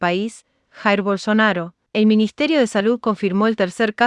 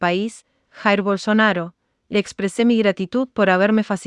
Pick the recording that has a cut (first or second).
first